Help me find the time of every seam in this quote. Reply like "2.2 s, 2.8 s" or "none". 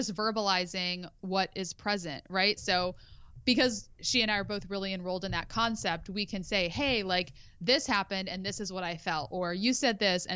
2.6 s